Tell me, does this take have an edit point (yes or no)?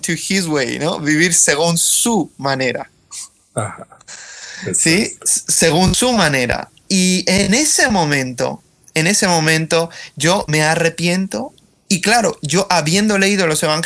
no